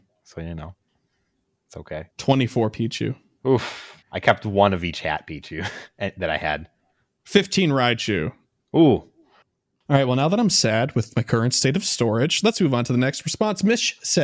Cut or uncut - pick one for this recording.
cut